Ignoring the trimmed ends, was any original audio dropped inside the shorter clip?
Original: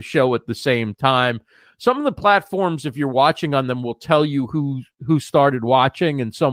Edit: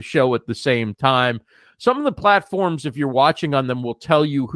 no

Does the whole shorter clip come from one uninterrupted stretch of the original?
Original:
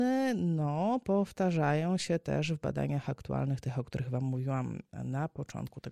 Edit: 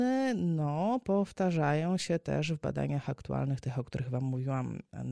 yes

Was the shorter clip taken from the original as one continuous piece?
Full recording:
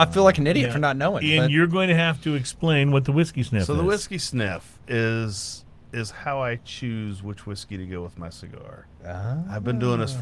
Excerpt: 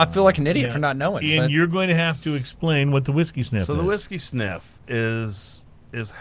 yes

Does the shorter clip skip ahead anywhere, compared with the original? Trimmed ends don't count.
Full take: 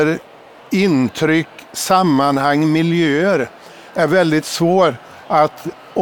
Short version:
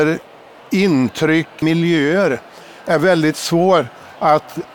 yes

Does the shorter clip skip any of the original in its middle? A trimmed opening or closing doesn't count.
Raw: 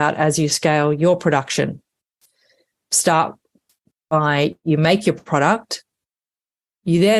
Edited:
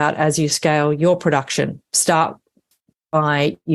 yes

